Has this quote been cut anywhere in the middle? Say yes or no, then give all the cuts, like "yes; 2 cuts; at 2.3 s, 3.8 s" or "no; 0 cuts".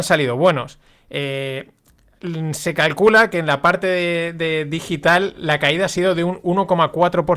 no; 0 cuts